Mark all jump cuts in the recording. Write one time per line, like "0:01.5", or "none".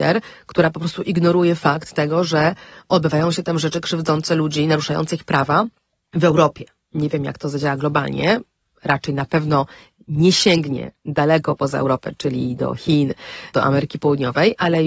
none

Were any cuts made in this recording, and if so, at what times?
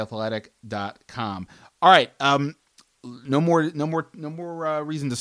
none

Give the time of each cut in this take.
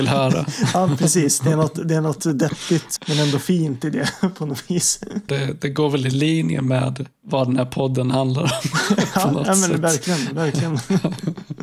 0:03.0
0:05.3

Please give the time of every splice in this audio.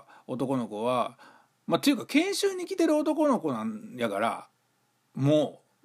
none

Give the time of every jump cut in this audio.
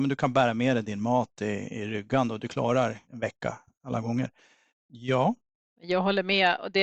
0:03.0
0:04.7

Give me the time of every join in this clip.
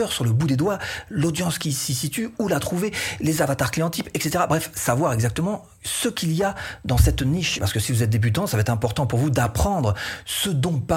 0:07.6

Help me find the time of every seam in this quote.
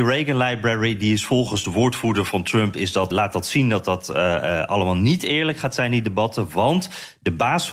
0:03.1

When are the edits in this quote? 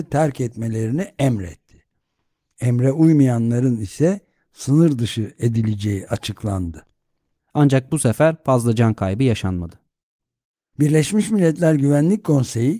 0:07.4

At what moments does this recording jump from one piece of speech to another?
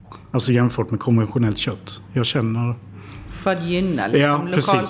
none

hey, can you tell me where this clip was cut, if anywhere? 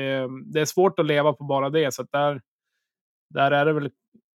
none

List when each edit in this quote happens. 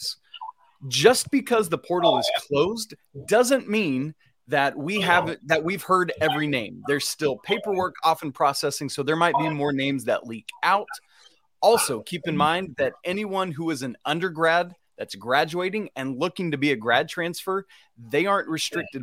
none

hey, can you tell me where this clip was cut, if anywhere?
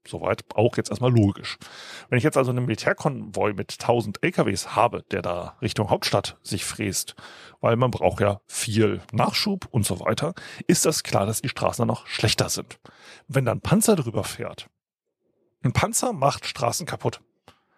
0:09.1
0:13.2

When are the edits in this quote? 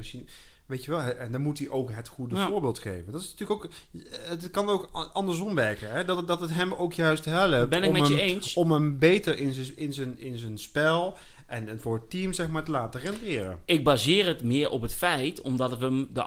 none

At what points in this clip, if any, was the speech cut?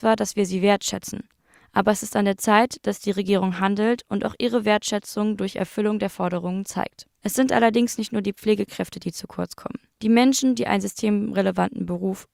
none

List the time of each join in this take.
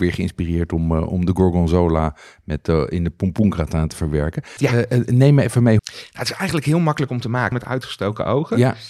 0:04.6
0:05.8
0:07.5

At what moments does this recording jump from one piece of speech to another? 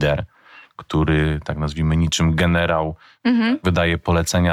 none

